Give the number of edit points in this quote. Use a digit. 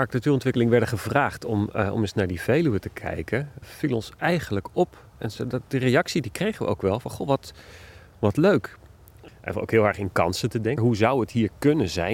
3